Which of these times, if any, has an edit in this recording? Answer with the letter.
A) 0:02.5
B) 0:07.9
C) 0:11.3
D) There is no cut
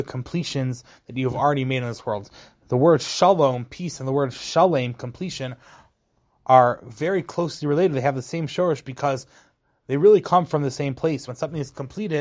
D